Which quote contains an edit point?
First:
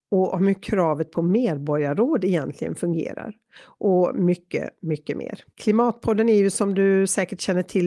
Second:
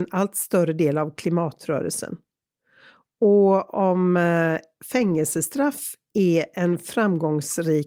first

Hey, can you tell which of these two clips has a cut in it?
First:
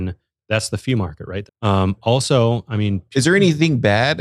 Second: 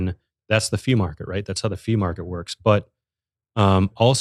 first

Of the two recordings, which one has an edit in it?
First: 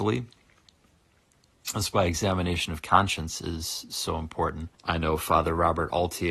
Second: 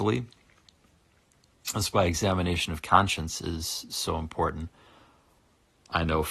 first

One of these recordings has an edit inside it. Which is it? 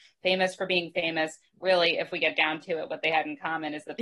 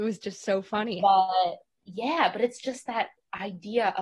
second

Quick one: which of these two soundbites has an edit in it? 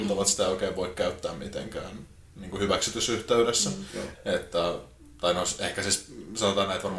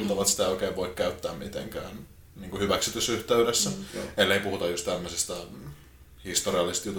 first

